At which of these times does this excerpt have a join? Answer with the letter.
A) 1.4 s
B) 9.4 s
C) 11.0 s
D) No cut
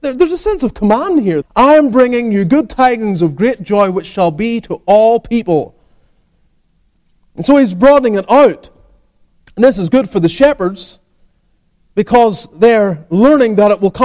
A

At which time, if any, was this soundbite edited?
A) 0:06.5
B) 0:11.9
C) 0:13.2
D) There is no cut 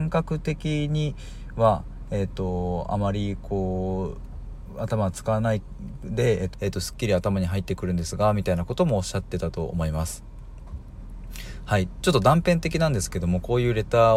A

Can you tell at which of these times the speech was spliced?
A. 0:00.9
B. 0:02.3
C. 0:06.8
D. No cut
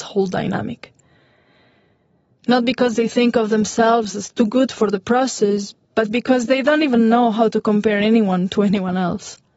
D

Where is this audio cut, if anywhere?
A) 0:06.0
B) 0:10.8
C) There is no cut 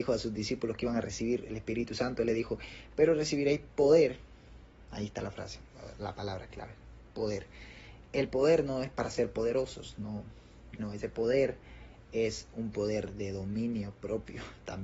B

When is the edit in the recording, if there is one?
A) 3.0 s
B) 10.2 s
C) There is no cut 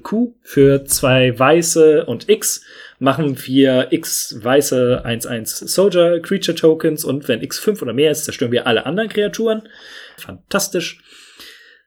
B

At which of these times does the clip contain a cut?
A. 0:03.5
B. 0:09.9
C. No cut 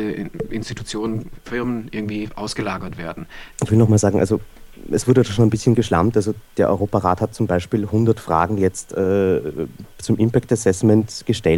A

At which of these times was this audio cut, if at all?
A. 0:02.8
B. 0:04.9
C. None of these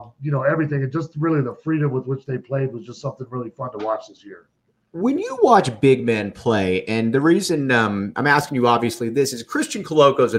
C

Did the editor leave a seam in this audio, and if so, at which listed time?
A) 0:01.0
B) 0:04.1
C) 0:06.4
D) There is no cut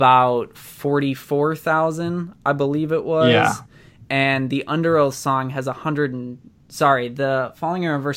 D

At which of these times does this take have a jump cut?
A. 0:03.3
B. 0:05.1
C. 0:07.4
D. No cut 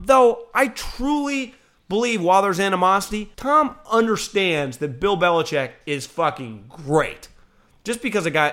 A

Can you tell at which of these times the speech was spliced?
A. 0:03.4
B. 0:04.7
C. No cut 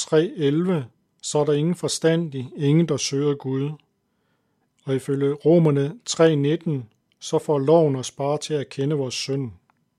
B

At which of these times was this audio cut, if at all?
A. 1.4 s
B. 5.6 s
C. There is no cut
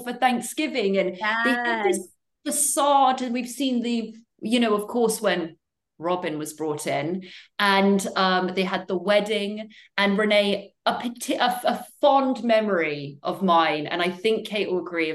C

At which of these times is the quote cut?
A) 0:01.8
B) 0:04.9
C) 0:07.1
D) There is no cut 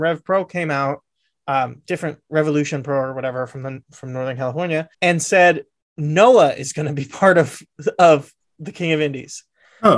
B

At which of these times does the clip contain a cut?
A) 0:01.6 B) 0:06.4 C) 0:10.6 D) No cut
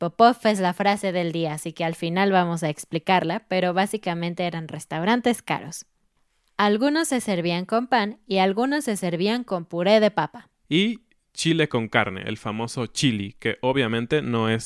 C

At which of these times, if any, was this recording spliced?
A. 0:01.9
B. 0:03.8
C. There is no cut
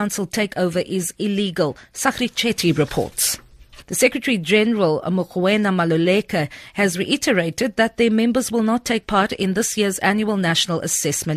B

